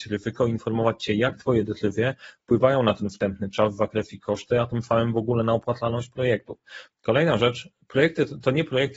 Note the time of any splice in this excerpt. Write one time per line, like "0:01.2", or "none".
0:06.9